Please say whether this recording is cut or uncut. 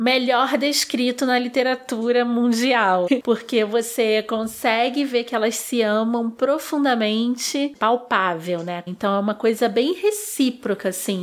cut